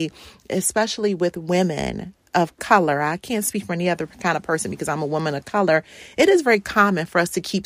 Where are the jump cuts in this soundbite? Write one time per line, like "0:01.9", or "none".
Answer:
none